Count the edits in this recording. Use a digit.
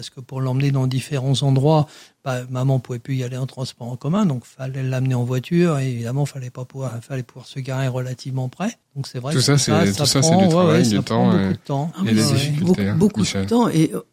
0